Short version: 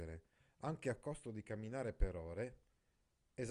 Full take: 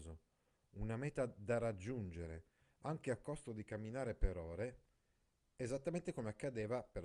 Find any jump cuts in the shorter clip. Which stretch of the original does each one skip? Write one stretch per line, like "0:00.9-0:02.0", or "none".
none